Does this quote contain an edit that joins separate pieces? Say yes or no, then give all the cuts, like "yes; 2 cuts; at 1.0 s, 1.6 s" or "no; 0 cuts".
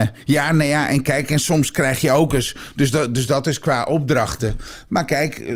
no; 0 cuts